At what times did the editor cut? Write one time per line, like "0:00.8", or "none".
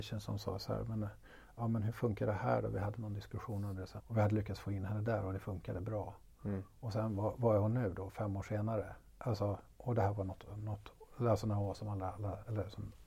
0:04.0

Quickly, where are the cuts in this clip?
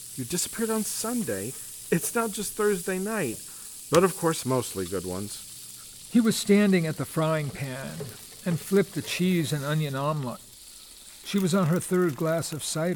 0:04.4
0:11.2

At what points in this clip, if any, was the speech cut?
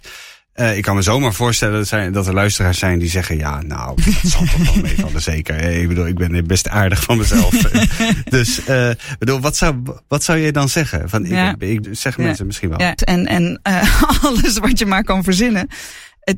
0:11.8
0:13.0

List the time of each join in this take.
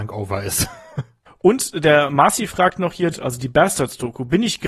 0:01.3
0:03.1

